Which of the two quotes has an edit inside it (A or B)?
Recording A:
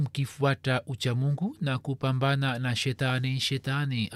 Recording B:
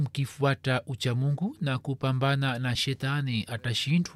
B